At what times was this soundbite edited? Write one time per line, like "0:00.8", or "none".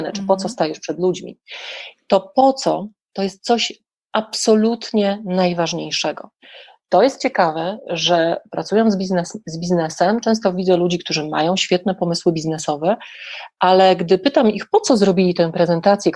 none